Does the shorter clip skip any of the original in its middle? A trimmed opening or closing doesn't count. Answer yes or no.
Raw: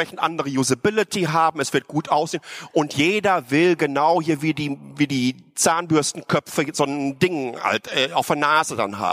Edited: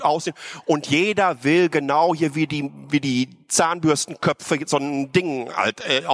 no